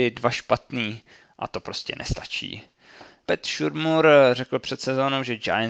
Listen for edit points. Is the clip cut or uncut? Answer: cut